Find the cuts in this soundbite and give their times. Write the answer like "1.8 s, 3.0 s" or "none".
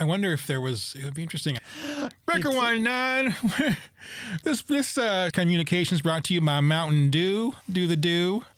1.6 s, 5.3 s

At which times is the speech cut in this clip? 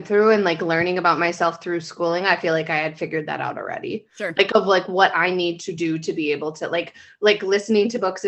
none

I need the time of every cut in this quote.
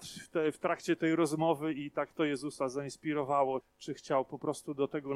3.6 s

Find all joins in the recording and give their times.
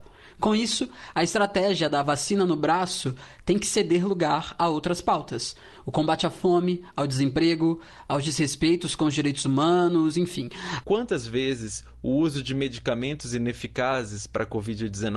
10.8 s

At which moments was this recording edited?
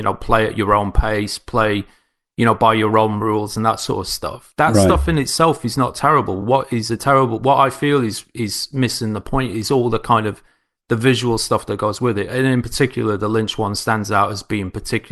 none

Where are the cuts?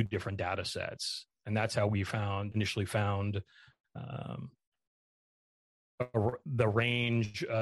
1.3 s, 2.5 s

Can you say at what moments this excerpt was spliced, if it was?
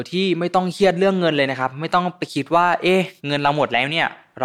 3.2 s

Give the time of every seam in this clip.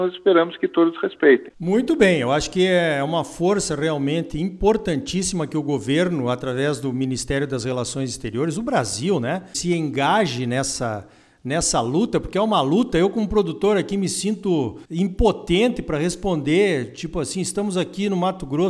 1.5 s, 14.8 s

